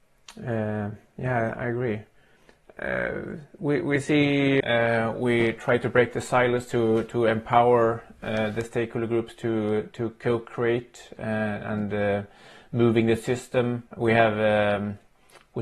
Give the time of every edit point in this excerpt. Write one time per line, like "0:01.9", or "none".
0:04.6
0:13.9